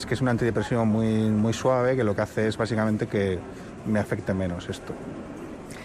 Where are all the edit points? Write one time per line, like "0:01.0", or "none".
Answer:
none

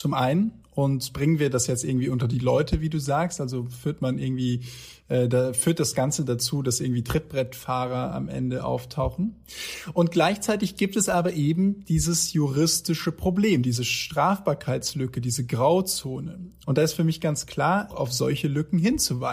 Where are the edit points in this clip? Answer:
0:17.9

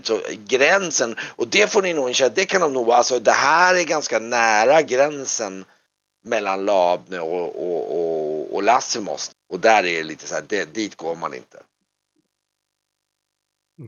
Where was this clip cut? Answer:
0:09.3

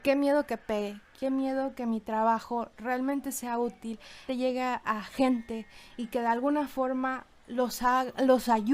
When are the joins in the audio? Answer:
0:04.3

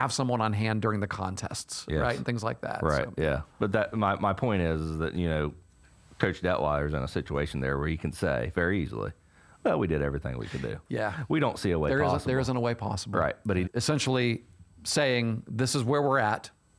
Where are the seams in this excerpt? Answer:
0:13.6

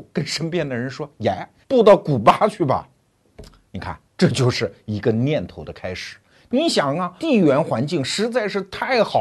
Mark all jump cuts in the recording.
0:01.6
0:07.2

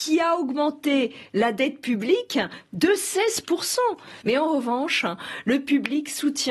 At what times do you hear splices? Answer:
0:04.2

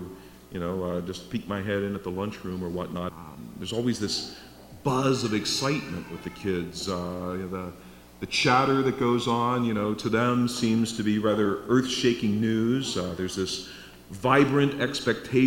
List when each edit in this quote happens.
0:03.1

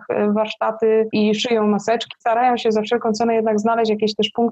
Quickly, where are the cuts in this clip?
0:02.1

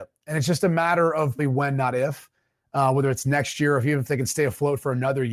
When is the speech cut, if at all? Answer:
0:01.4

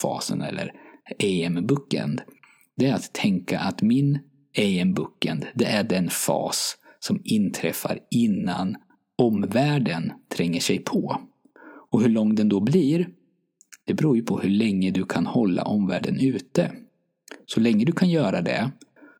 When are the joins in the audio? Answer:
none

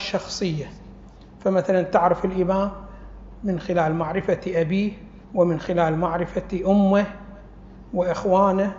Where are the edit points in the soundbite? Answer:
0:05.2

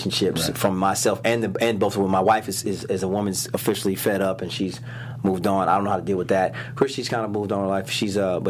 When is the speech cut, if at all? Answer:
none

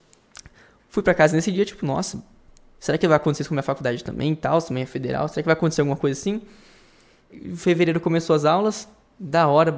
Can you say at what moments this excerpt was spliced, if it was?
0:07.3

